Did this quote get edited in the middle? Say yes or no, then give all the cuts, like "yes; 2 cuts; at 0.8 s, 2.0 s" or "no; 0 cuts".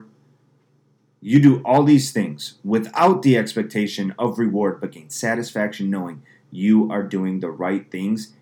no; 0 cuts